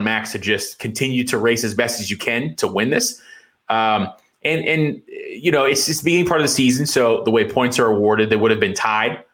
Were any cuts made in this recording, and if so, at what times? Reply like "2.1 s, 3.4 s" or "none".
none